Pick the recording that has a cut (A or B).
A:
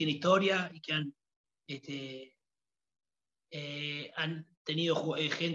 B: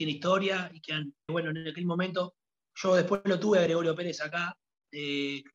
B